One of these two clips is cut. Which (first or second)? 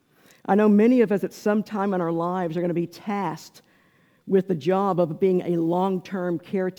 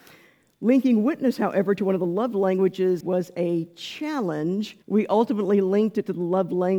second